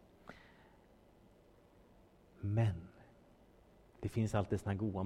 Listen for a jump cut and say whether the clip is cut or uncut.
uncut